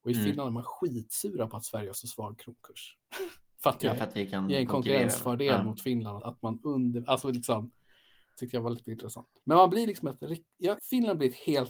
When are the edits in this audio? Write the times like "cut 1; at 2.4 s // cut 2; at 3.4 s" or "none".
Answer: cut 1; at 6.2 s // cut 2; at 10.8 s

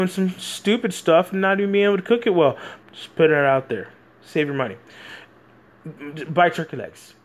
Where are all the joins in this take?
cut 1; at 2.8 s

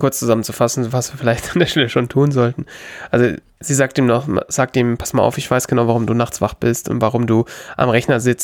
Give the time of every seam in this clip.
none

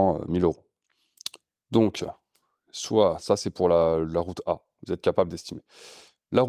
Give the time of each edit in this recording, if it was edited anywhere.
none

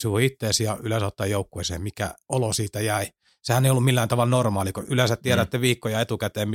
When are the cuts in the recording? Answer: none

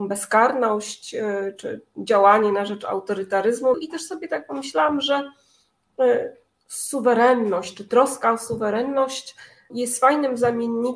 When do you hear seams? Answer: cut 1; at 3.7 s // cut 2; at 9.7 s

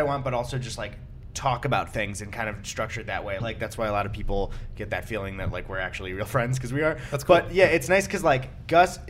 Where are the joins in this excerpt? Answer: cut 1; at 3.4 s

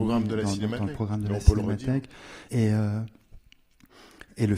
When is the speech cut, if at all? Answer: cut 1; at 2.5 s

